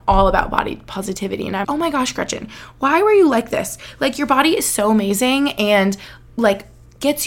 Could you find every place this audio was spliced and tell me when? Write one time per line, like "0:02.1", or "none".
0:01.6

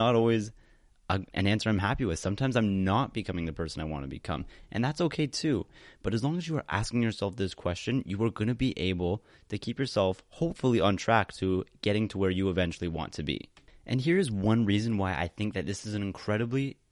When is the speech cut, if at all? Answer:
none

